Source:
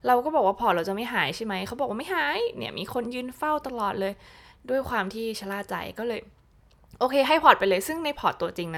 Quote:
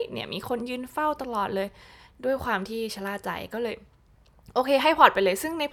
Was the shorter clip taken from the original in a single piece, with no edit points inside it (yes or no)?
yes